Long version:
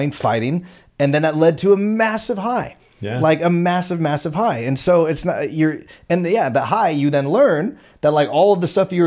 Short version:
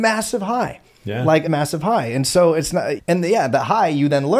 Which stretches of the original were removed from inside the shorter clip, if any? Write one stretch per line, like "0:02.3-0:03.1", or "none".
0:03.4-0:04.0
0:05.5-0:06.0